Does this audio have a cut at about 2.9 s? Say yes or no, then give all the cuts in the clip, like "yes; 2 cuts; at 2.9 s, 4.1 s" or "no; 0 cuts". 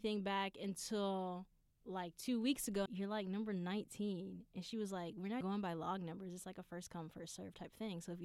yes; 2 cuts; at 2.9 s, 5.4 s